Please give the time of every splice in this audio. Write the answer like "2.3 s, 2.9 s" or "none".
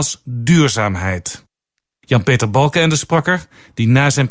none